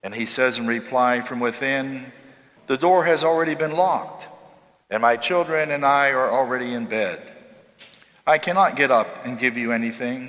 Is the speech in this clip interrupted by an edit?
yes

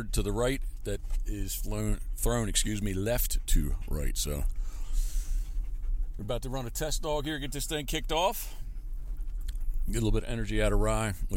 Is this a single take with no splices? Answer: yes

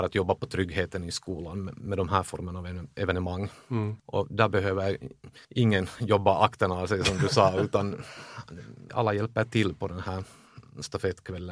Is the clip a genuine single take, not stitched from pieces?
no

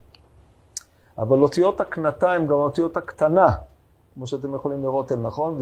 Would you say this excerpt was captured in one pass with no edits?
yes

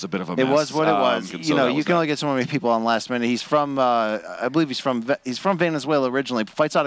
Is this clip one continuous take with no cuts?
no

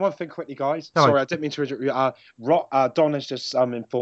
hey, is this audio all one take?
yes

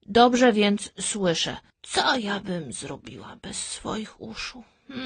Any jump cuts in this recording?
yes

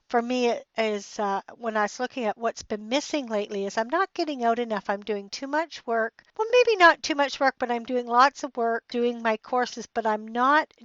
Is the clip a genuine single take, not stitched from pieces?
no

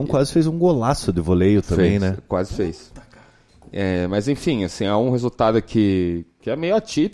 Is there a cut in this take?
no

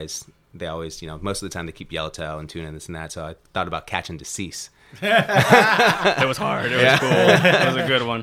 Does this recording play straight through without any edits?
yes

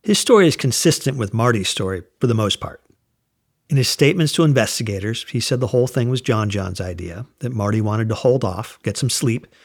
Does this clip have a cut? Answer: no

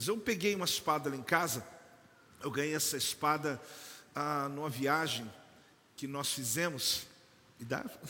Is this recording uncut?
yes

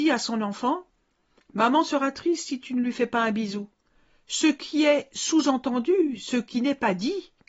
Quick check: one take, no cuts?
yes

